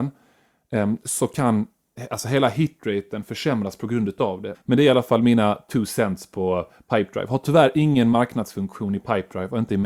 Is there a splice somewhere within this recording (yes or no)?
yes